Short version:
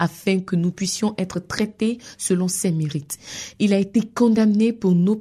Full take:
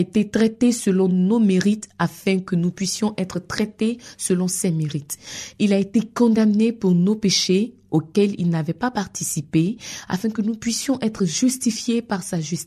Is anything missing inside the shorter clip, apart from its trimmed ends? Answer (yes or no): no